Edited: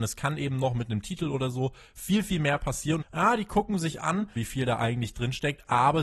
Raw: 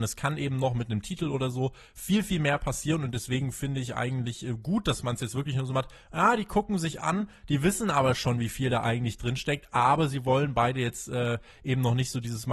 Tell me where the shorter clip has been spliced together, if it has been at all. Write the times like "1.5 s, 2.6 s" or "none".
3.0 s, 4.4 s

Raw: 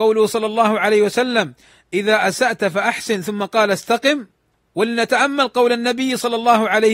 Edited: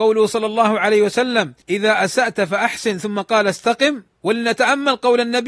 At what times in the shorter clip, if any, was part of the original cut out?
1.6 s, 4.1 s

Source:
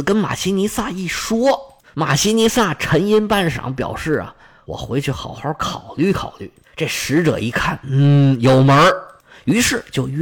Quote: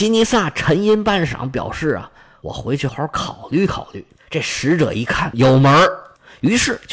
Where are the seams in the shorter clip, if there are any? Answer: 2.9 s, 5.3 s

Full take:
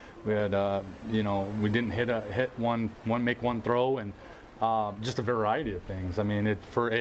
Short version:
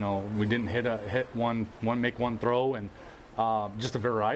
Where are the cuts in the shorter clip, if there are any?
none

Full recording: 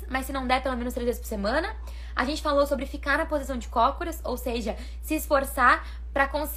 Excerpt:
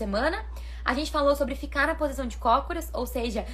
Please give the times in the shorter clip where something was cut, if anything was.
none

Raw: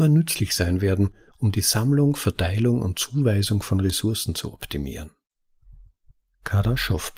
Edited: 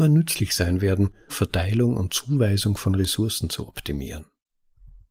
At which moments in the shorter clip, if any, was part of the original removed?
1.3 s

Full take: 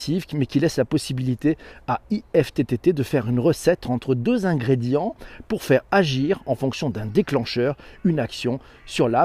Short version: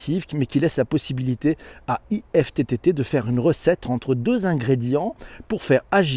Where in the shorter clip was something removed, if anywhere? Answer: none

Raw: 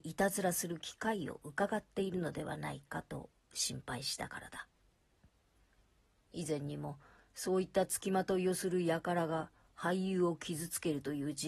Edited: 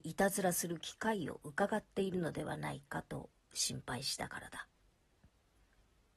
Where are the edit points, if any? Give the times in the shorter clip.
none

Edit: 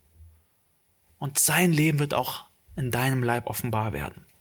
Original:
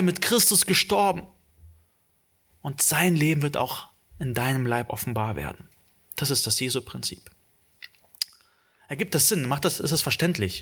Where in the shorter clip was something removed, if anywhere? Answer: none

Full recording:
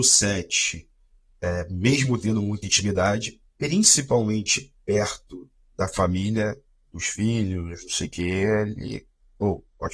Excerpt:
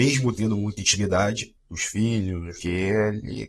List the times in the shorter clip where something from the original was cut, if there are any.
1.6 s, 2.6 s

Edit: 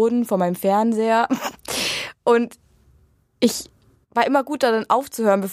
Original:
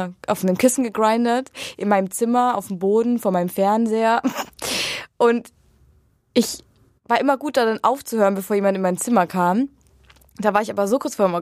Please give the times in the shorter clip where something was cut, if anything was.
none

